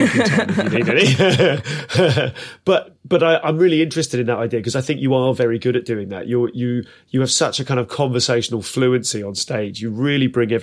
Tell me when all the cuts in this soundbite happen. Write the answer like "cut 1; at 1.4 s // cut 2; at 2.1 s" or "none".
none